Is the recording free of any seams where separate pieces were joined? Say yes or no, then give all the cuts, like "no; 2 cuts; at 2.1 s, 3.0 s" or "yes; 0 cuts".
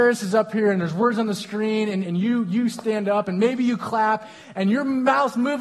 no; 1 cut; at 2.0 s